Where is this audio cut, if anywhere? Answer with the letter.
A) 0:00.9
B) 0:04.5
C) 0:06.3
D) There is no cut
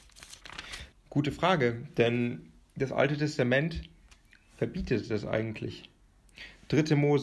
A